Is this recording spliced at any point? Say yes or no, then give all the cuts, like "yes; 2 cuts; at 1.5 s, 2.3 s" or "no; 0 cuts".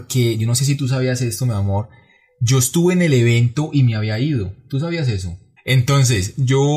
yes; 1 cut; at 5.6 s